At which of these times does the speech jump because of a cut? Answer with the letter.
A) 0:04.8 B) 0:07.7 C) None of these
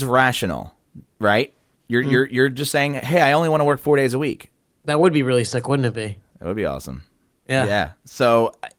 A